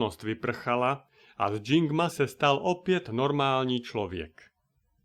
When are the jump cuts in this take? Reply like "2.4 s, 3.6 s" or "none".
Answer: 2.1 s